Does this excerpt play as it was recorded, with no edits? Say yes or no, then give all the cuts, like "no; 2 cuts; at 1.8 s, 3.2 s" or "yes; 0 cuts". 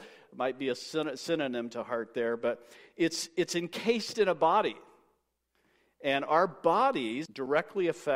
no; 1 cut; at 7.3 s